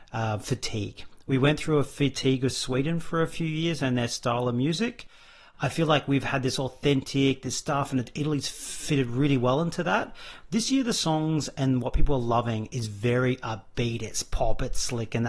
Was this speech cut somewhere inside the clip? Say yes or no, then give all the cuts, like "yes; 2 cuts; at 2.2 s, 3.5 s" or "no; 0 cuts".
no; 0 cuts